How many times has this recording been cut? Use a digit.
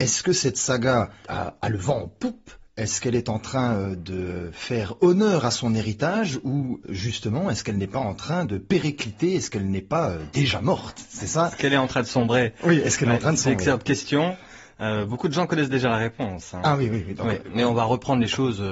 0